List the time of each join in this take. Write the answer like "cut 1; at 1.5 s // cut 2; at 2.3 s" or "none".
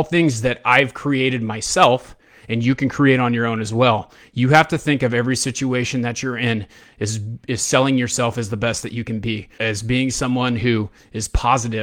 cut 1; at 9.6 s